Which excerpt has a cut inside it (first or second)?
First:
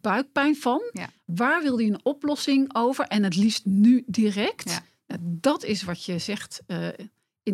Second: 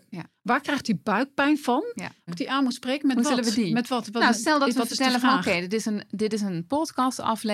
second